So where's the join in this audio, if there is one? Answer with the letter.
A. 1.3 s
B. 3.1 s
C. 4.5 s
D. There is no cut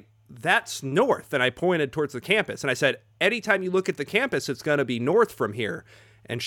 D